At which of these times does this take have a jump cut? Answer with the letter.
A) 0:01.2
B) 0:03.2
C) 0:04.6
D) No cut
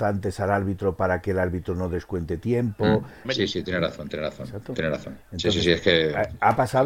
B